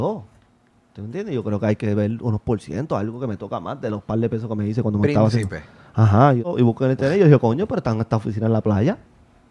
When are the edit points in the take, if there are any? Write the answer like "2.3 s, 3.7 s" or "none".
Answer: none